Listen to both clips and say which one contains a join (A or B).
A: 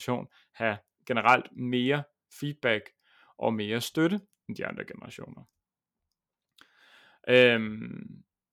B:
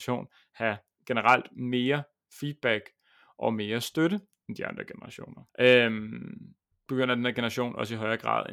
B